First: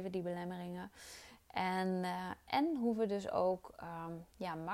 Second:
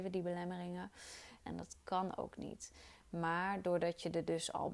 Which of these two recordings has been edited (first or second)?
second